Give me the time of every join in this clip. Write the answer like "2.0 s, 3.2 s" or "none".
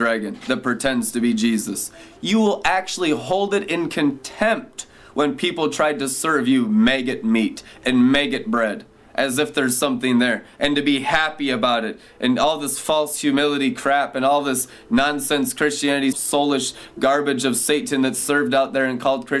16.1 s